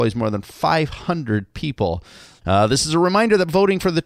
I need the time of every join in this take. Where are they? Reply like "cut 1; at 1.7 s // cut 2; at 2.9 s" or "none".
cut 1; at 2.4 s